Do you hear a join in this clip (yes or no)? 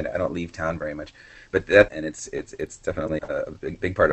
yes